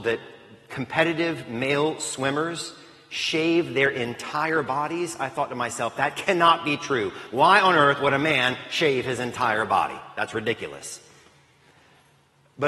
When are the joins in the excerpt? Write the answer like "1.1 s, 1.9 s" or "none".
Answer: none